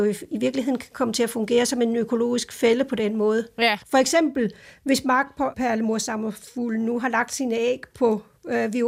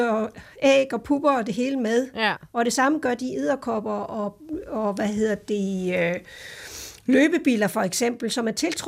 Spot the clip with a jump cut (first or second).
first